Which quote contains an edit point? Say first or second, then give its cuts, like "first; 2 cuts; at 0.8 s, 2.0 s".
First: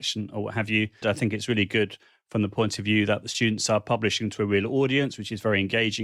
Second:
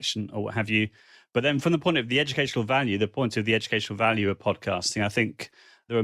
first; 1 cut; at 1.0 s